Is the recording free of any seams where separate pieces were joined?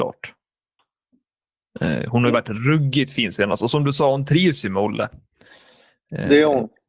yes; 0 cuts

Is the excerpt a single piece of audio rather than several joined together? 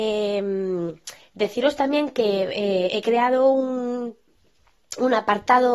yes; 0 cuts

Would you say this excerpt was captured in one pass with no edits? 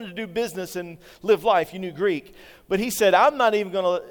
yes; 0 cuts

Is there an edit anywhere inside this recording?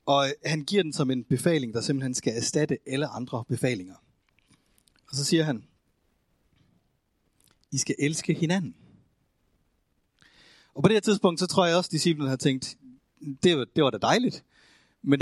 no; 0 cuts

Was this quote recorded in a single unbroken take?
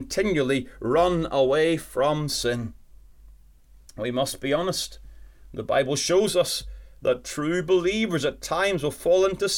yes; 0 cuts

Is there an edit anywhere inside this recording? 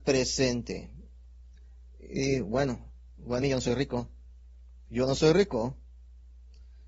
yes; 1 cut; at 3.4 s

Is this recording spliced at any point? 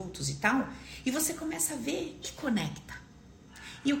yes; 1 cut; at 2.2 s

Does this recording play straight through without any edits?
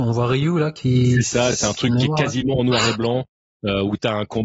yes; 0 cuts

